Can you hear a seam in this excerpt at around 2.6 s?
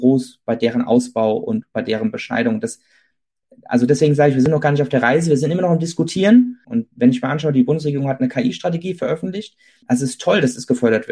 no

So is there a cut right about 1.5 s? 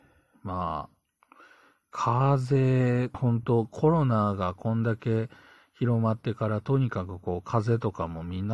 no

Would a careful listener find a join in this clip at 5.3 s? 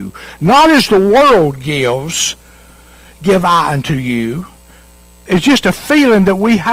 yes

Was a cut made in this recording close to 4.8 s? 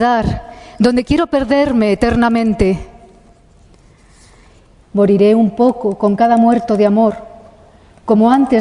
yes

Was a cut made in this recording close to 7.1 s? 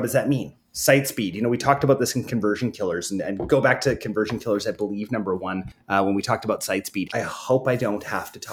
yes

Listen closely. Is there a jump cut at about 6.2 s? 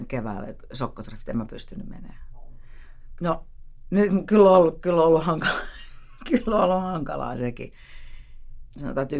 no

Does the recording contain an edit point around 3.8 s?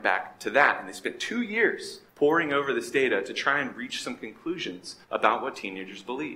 no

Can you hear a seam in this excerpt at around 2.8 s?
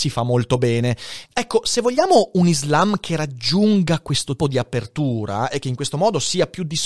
no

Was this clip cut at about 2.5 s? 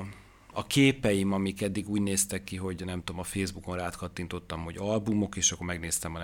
no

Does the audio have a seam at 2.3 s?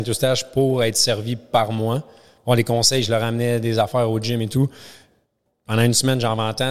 no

